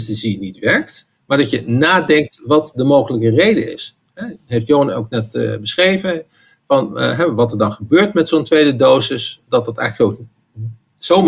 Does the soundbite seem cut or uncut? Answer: cut